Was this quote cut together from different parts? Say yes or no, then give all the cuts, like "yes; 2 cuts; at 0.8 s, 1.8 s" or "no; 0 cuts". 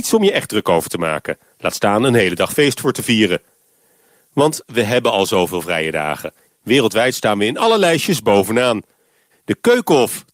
yes; 2 cuts; at 6.5 s, 9.3 s